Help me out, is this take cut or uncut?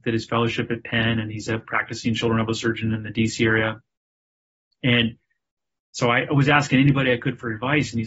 uncut